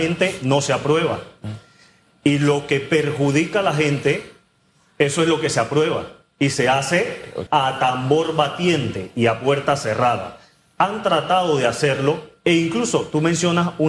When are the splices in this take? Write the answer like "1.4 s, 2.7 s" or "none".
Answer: 7.5 s